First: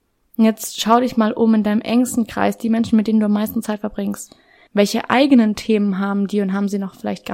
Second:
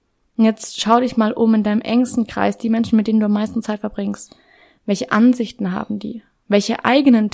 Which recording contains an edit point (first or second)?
first